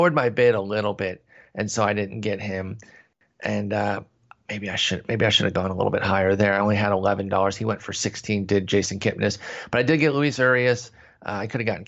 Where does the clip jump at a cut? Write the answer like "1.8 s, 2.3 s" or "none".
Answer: none